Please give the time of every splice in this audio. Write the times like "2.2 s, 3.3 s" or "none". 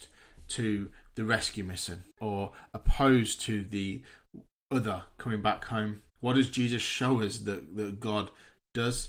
2.1 s, 6.1 s